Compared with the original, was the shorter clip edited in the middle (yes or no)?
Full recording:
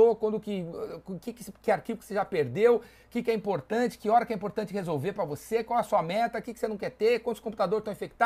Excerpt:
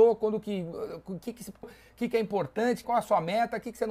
yes